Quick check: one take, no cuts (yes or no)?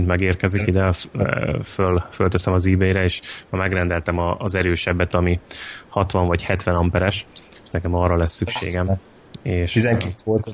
yes